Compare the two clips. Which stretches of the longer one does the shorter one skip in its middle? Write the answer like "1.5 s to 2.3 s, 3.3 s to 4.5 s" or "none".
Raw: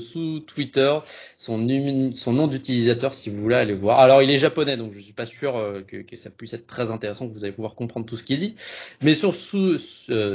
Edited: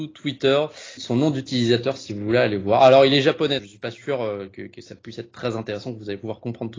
1.3 s to 2.1 s, 4.8 s to 4.9 s